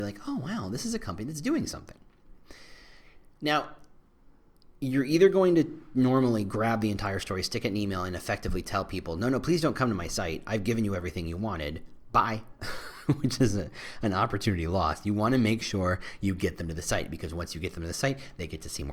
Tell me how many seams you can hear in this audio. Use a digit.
0